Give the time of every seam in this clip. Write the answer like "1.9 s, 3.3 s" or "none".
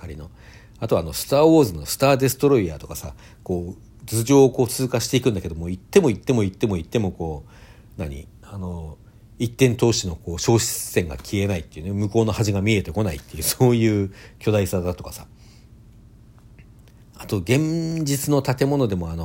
none